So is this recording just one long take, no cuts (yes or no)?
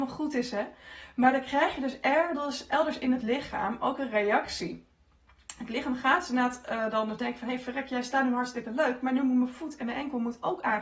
yes